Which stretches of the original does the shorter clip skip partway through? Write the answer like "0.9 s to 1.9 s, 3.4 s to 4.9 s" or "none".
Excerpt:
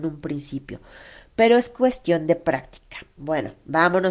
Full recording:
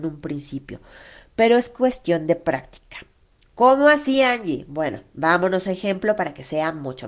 3.2 s to 4.7 s